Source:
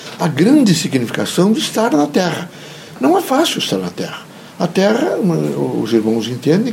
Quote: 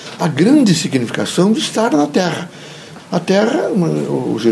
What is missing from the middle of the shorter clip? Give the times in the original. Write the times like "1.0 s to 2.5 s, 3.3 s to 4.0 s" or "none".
3.0 s to 4.5 s

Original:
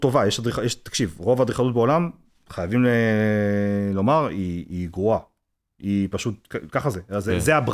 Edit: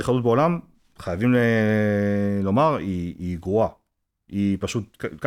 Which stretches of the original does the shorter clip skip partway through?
none

